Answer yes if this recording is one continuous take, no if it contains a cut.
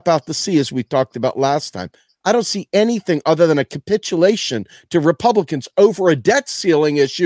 yes